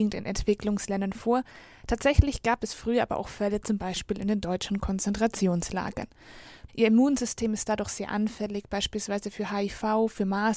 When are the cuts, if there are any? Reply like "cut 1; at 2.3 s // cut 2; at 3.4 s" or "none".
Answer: cut 1; at 6.7 s